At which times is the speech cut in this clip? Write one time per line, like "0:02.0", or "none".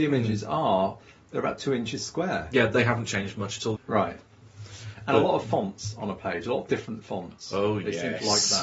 0:03.7